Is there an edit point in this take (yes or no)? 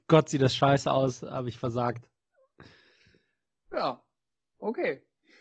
no